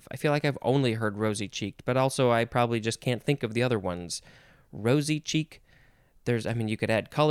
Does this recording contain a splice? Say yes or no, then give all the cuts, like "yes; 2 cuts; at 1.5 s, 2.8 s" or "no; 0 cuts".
no; 0 cuts